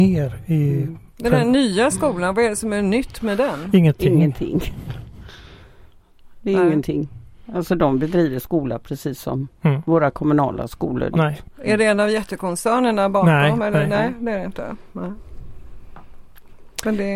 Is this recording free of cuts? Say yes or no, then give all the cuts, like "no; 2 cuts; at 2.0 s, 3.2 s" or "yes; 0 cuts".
no; 2 cuts; at 1.1 s, 11.1 s